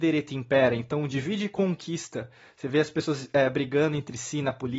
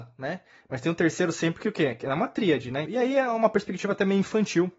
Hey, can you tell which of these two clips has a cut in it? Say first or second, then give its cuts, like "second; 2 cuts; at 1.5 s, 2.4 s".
second; 1 cut; at 2.9 s